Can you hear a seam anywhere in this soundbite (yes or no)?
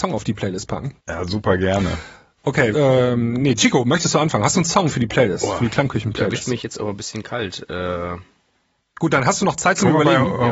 yes